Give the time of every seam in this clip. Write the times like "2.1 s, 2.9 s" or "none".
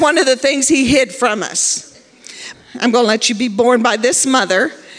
2.5 s